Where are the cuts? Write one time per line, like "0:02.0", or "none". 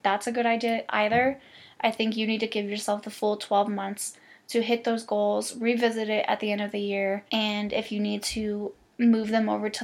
0:07.3